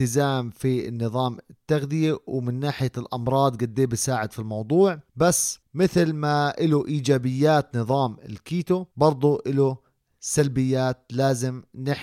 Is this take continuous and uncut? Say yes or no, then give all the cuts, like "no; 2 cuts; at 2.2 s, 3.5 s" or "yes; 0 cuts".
no; 1 cut; at 8.9 s